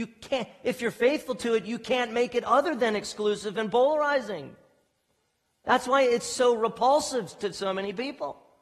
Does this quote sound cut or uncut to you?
uncut